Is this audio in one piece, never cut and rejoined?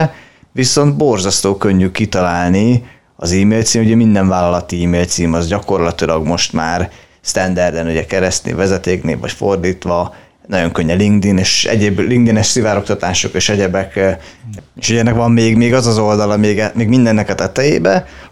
no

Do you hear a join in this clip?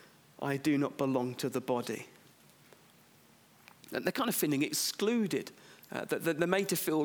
no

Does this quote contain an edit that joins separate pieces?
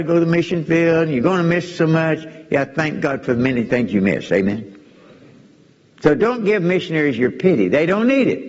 no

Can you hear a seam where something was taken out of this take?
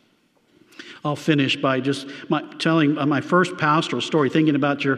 no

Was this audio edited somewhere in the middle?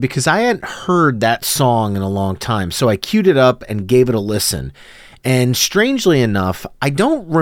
no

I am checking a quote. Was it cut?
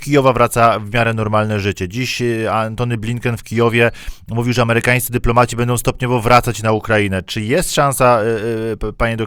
no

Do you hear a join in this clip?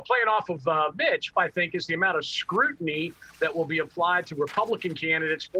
yes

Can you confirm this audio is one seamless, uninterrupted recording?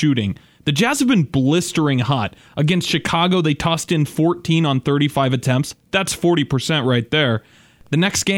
yes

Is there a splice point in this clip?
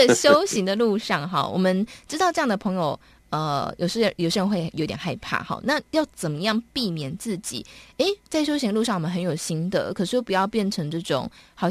no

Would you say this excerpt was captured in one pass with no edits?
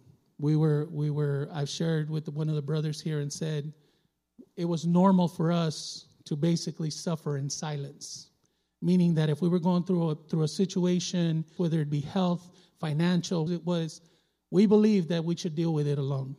no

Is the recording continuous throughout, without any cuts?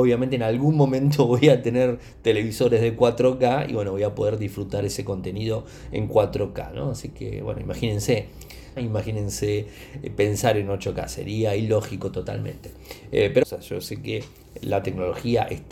no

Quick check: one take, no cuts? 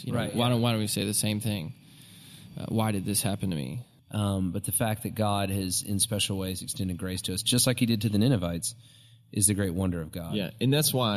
no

